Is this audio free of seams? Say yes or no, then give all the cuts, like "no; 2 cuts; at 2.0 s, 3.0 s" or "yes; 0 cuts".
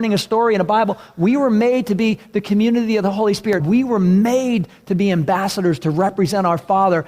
no; 1 cut; at 3.6 s